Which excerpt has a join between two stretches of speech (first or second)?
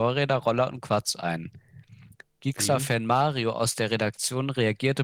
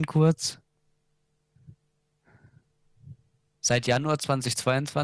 second